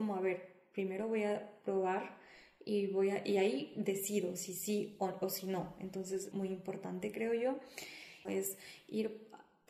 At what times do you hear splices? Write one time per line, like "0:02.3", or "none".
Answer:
0:06.3
0:08.2